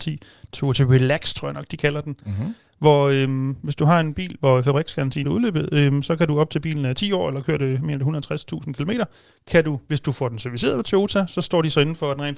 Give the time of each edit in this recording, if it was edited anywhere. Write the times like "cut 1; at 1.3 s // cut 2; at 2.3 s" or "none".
cut 1; at 5.2 s